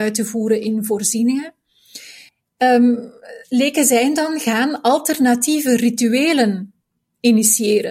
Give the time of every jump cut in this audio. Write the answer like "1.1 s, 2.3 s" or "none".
none